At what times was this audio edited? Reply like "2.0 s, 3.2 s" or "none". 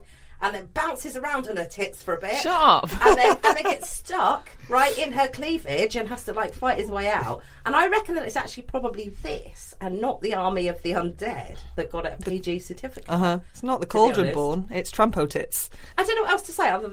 none